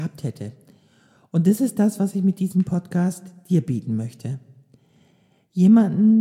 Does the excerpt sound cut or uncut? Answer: uncut